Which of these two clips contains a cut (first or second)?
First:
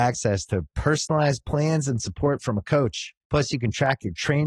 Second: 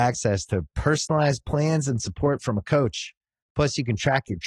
first